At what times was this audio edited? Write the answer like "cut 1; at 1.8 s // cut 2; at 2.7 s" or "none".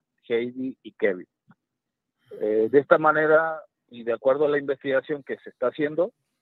none